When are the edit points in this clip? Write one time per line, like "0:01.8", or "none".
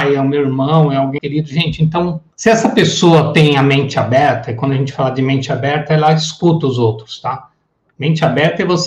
0:01.2
0:02.3